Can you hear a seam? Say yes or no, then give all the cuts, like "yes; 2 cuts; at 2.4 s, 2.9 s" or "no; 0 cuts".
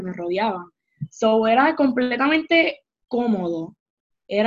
no; 0 cuts